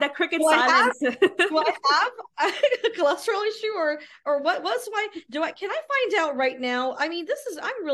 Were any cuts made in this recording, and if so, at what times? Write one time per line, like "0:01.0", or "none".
none